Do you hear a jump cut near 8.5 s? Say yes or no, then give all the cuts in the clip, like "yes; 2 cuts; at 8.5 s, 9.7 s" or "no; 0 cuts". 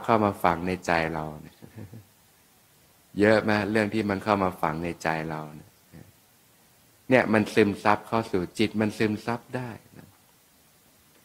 yes; 1 cut; at 8.5 s